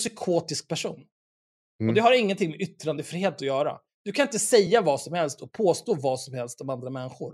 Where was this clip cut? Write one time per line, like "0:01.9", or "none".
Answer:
none